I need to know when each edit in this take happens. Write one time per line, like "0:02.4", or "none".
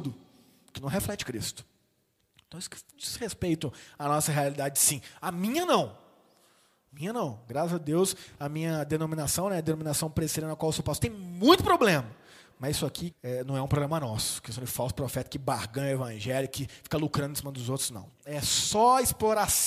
0:13.1
0:18.1